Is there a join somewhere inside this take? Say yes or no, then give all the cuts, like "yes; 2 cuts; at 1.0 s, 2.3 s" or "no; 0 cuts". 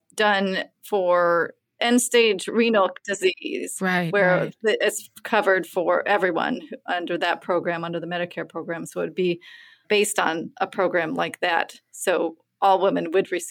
no; 0 cuts